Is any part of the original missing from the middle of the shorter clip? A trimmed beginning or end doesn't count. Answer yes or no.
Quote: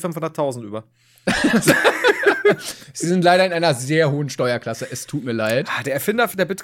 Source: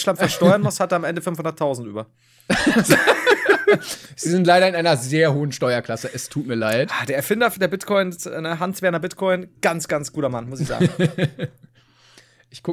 no